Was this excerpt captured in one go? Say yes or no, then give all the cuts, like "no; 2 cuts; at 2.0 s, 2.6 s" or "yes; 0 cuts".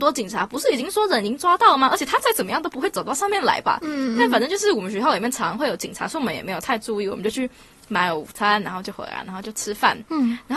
yes; 0 cuts